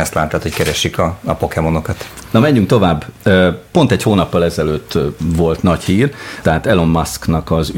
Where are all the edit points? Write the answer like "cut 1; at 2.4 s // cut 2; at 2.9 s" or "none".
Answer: cut 1; at 6.4 s